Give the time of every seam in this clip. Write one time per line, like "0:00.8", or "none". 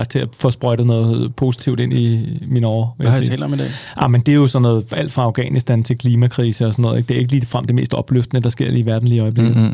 none